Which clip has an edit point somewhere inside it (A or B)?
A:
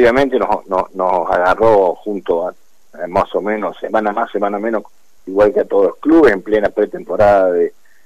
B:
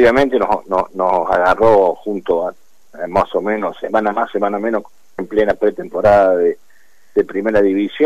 B